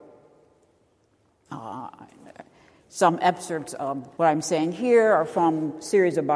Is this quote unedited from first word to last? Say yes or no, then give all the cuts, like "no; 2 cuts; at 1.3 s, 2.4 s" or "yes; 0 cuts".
no; 2 cuts; at 1.5 s, 4.1 s